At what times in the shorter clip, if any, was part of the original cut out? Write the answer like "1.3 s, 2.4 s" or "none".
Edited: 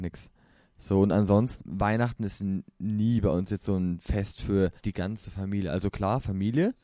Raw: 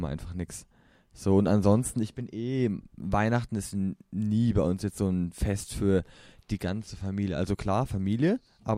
1.6 s, 4.8 s